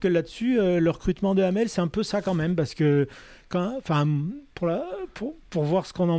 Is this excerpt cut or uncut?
uncut